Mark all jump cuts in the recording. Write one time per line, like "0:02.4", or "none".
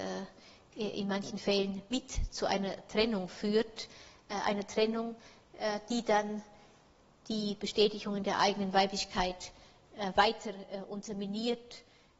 none